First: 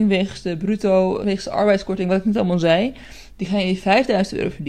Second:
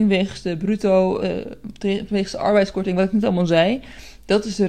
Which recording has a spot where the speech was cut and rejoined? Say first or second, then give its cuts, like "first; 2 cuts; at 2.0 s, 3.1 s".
first; 2 cuts; at 1.2 s, 3.3 s